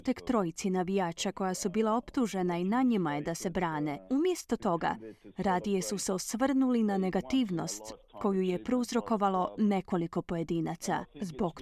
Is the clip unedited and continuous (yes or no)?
no